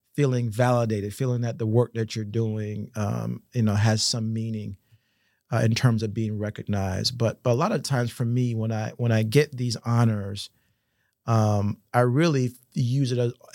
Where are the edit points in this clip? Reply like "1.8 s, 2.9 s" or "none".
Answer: none